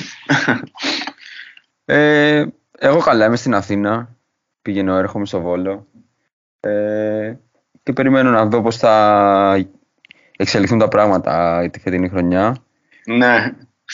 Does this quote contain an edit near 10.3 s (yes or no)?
no